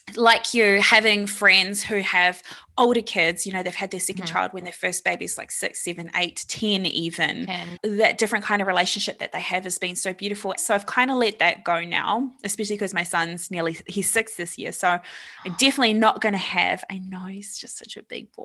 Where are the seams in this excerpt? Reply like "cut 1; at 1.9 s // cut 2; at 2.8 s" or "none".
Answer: cut 1; at 7.8 s // cut 2; at 10.6 s